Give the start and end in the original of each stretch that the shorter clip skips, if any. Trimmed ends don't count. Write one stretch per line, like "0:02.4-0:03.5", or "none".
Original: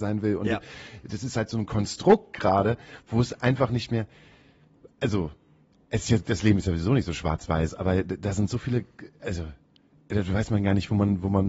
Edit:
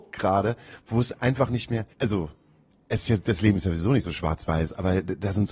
0:04.1-0:04.9